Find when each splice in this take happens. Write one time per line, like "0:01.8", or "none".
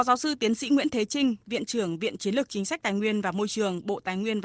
none